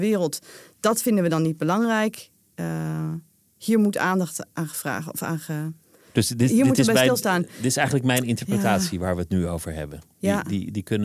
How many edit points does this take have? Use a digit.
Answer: 0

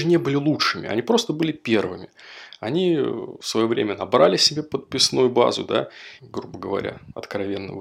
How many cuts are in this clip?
1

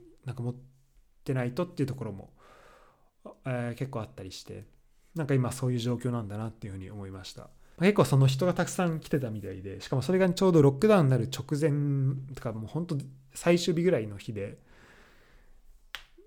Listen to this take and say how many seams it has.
1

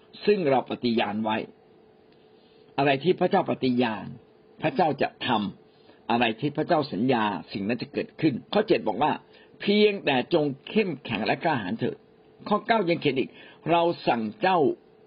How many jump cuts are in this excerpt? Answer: 1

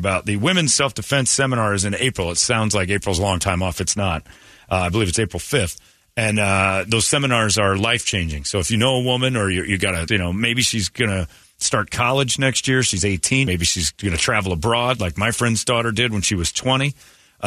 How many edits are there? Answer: 2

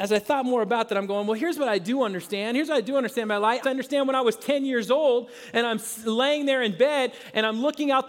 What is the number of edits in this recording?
1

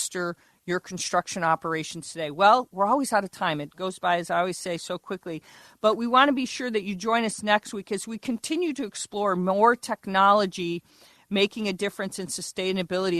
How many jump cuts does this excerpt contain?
1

